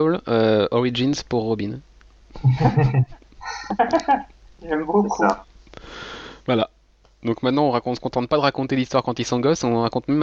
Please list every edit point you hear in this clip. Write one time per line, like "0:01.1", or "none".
none